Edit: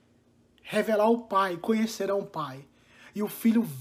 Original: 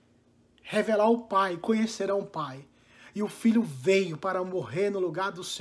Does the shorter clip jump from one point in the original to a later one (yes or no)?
no